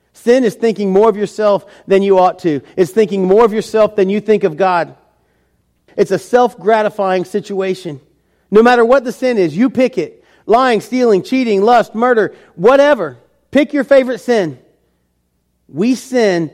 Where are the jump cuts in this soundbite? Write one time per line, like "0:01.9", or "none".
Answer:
0:05.9